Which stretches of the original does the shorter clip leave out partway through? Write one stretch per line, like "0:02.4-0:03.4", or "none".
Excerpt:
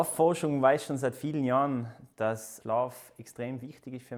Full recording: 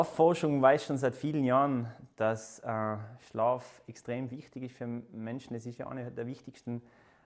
0:02.6-0:03.3